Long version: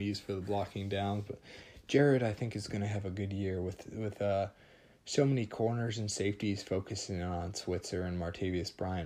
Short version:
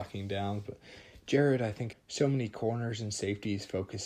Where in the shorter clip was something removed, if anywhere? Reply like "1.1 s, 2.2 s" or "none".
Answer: 1.9 s